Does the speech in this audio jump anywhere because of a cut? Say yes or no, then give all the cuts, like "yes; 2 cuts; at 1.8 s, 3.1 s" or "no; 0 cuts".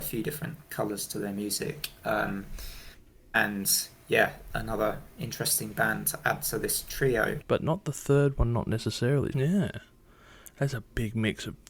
yes; 3 cuts; at 4.5 s, 7.4 s, 9.3 s